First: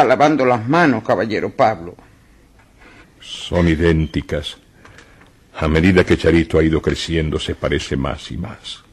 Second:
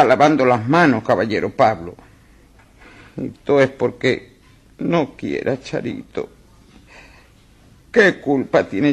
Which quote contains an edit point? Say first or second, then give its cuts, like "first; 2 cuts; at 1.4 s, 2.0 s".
first; 1 cut; at 3.0 s